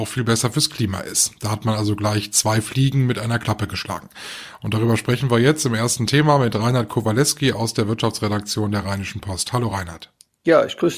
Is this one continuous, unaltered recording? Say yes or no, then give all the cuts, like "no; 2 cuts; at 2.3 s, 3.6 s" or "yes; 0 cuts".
yes; 0 cuts